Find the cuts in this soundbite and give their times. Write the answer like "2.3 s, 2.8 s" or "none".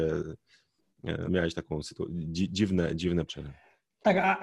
1.3 s, 3.3 s